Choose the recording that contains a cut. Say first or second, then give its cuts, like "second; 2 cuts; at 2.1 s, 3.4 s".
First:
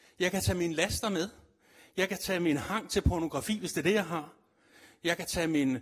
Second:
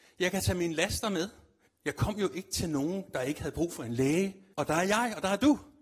second; 2 cuts; at 1.7 s, 4.5 s